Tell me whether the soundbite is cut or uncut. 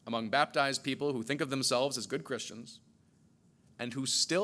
uncut